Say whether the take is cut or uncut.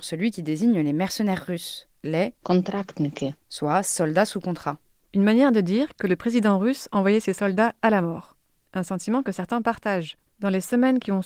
cut